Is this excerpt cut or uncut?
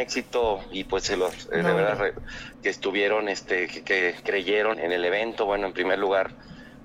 cut